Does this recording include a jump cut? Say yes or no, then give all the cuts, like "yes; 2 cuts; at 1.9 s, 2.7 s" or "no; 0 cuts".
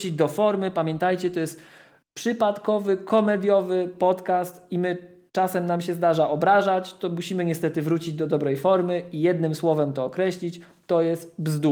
no; 0 cuts